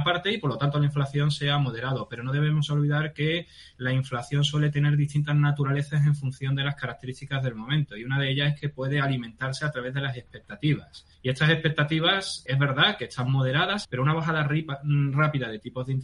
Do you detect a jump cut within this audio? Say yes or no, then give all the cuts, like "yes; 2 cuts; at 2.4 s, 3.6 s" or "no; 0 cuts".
yes; 3 cuts; at 11.1 s, 12.5 s, 13.8 s